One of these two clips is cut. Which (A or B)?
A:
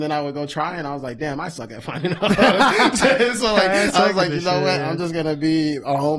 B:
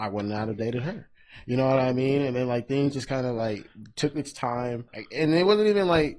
B